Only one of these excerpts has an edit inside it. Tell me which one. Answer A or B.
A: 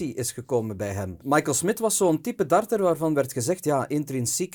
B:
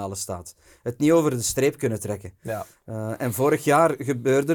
A